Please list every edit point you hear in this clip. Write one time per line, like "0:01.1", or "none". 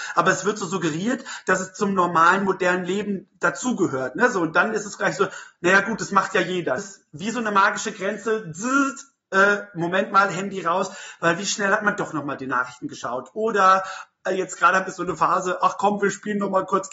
0:06.8